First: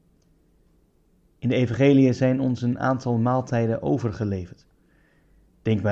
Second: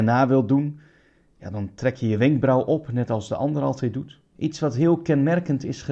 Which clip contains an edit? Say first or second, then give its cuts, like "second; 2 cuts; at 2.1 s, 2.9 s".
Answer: second; 1 cut; at 4.4 s